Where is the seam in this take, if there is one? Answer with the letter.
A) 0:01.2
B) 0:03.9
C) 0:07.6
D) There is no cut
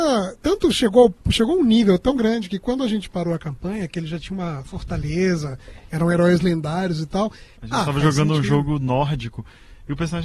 C